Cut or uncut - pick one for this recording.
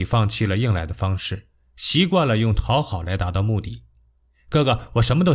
uncut